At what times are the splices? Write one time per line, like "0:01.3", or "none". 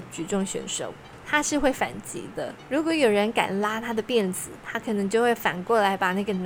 none